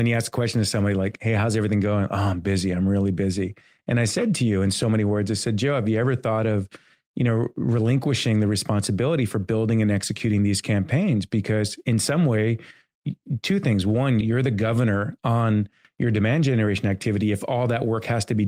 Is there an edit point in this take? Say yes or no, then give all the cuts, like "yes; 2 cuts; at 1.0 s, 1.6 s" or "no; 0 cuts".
yes; 1 cut; at 14.2 s